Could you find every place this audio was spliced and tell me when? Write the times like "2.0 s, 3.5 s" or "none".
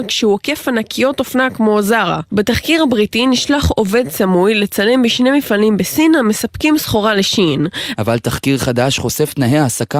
7.9 s